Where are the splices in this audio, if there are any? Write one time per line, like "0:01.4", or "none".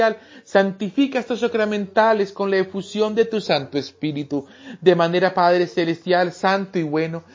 none